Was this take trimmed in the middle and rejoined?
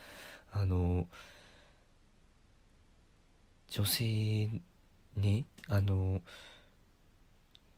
no; 0 cuts

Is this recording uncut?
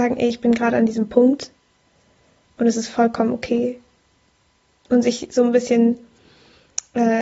yes; 0 cuts

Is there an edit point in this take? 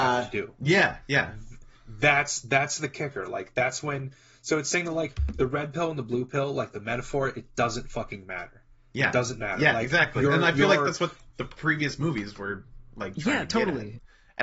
no; 0 cuts

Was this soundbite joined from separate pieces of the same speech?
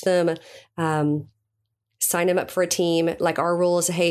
no; 0 cuts

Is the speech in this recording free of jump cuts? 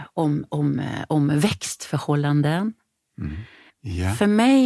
no; 1 cut; at 3.7 s

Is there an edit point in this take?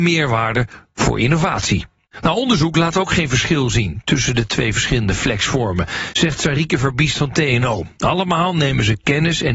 no; 0 cuts

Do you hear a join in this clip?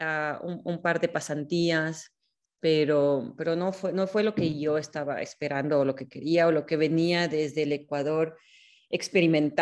no; 0 cuts

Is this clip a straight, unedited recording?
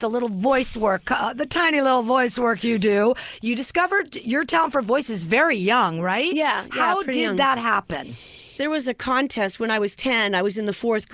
no; 1 cut; at 8.6 s

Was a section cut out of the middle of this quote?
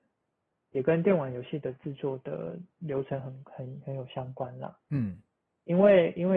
no; 0 cuts

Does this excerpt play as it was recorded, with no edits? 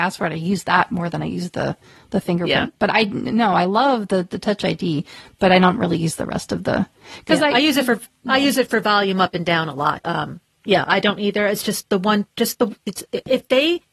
no; 1 cut; at 10.0 s

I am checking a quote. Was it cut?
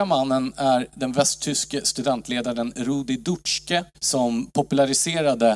yes; 1 cut; at 3.9 s

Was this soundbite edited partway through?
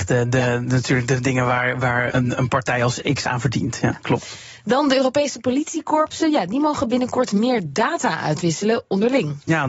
yes; 1 cut; at 2.1 s

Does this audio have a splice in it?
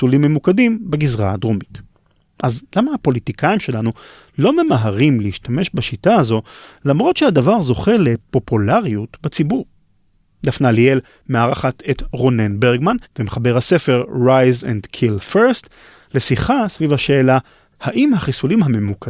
yes; 1 cut; at 13.0 s

